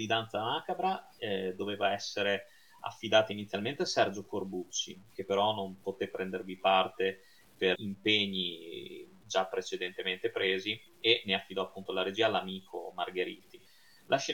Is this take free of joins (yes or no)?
no